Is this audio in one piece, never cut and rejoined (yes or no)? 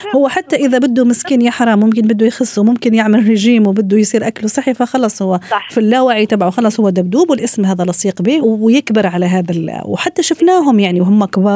no